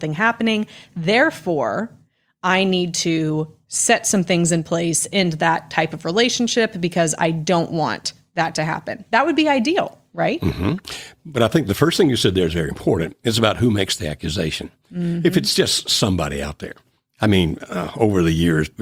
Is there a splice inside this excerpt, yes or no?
no